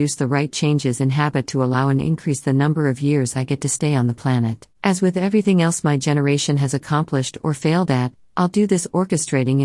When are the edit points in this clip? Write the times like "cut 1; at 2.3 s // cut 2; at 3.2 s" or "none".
cut 1; at 4.7 s